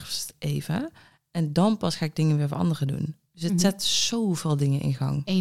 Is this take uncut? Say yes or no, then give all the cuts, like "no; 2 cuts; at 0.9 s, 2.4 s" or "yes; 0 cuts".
yes; 0 cuts